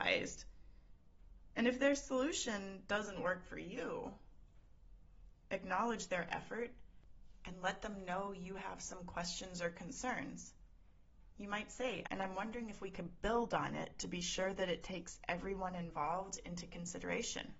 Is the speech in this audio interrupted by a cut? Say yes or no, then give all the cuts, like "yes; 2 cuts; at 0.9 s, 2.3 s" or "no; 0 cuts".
yes; 1 cut; at 12.1 s